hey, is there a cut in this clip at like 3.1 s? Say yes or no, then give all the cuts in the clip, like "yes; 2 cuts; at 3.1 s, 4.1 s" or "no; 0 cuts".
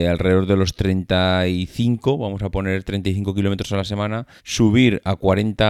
no; 1 cut; at 4.4 s